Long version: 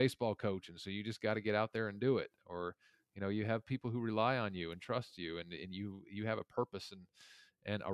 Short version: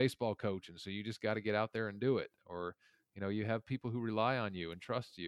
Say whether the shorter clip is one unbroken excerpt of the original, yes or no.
yes